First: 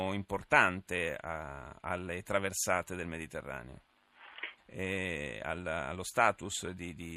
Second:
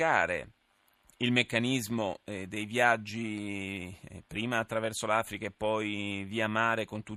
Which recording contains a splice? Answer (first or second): first